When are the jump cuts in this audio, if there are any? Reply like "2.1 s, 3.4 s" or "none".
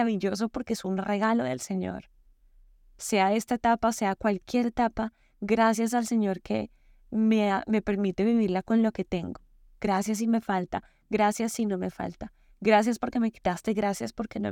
none